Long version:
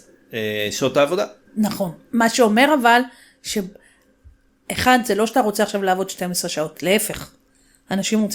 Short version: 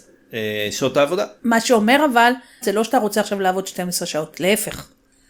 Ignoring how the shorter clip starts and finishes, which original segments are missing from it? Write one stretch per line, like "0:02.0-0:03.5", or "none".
0:01.4-0:02.1
0:03.3-0:05.0